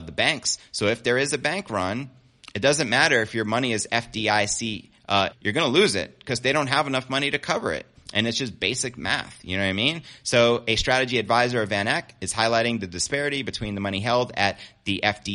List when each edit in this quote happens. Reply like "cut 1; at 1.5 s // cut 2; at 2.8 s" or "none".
cut 1; at 5.3 s